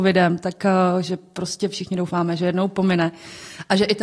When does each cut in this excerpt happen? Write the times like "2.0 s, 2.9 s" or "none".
none